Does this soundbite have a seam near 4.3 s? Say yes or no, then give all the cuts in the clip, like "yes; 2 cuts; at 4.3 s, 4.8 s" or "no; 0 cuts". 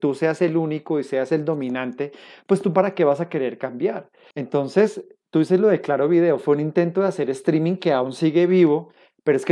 yes; 1 cut; at 4.3 s